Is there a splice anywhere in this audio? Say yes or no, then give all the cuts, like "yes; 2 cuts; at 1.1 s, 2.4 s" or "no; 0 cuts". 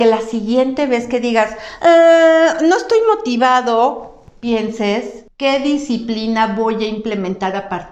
no; 0 cuts